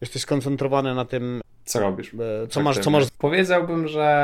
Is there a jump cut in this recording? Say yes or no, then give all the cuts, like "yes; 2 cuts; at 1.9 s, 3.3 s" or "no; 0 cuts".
yes; 1 cut; at 3.1 s